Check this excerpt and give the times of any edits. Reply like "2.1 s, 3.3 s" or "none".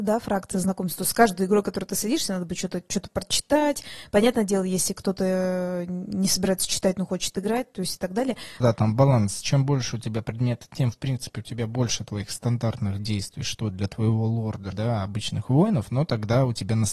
8.6 s, 14.7 s